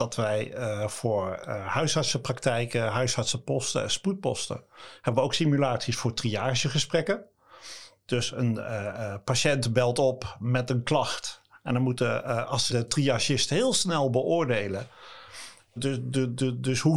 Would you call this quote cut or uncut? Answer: cut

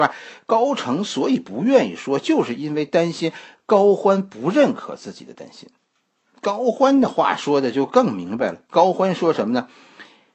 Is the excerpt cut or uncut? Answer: uncut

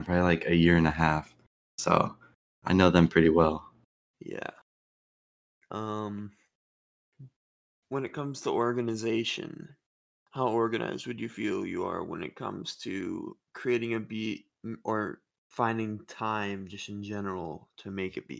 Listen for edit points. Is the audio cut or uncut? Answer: cut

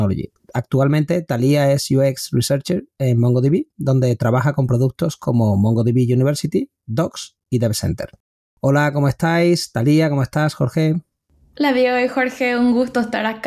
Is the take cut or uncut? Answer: uncut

